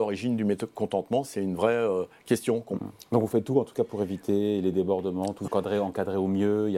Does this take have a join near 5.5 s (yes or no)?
yes